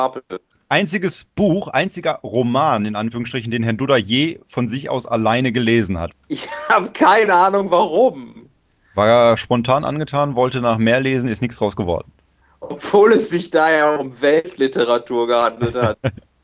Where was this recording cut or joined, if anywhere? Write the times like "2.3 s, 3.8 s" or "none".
none